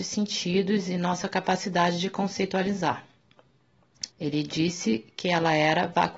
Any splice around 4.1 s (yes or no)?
yes